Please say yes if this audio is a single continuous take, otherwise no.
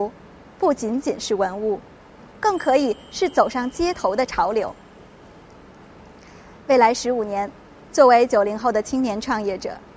yes